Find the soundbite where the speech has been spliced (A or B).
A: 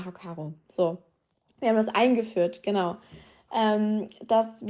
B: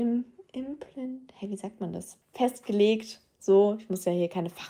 B